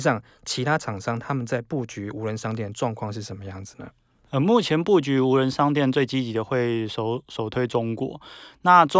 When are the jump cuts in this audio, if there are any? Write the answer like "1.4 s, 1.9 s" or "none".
none